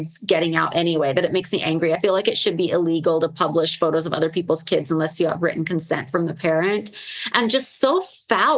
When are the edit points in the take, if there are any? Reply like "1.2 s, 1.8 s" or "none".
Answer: none